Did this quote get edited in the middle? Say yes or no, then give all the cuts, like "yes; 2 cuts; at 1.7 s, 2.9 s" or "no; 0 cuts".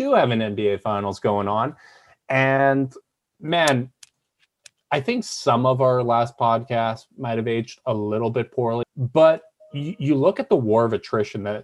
yes; 1 cut; at 8.8 s